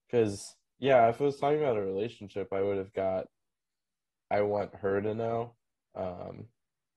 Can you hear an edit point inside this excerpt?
no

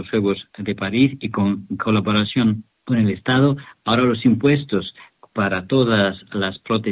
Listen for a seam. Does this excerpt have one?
no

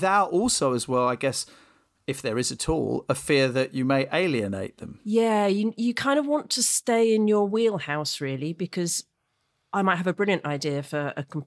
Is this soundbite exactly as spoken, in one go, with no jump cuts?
yes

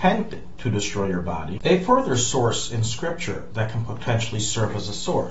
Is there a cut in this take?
yes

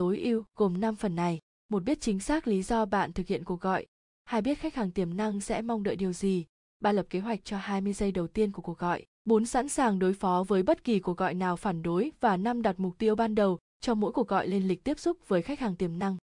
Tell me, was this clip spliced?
no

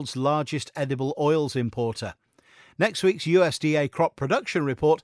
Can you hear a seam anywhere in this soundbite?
no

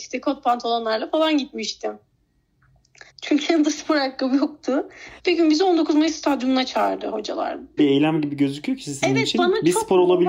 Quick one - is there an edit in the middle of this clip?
yes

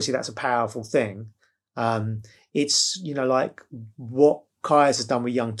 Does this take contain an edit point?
no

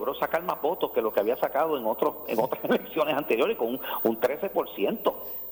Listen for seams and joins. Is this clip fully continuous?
yes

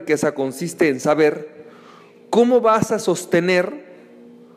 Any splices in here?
no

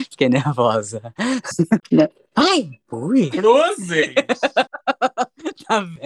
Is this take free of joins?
no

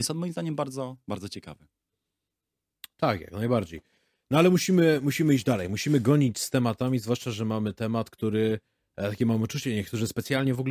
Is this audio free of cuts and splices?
yes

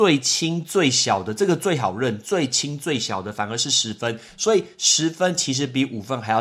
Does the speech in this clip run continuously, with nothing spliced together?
yes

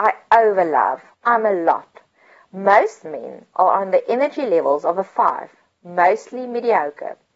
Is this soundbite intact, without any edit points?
no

